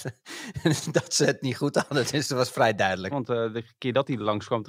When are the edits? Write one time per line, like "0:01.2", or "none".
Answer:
0:03.1